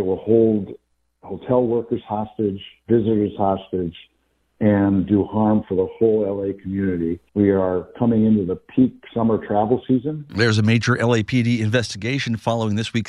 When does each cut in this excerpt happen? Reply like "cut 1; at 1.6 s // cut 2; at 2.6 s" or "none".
cut 1; at 7.3 s // cut 2; at 10.3 s